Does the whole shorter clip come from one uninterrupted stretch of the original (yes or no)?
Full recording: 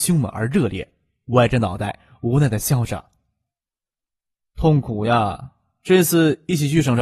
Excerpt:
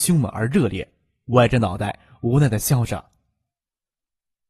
yes